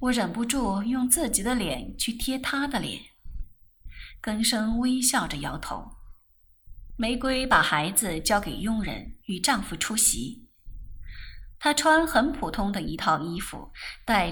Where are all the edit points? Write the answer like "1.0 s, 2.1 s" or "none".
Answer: 6.9 s